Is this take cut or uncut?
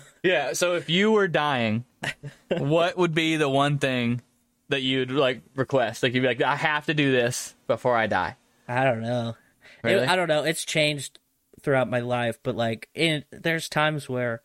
cut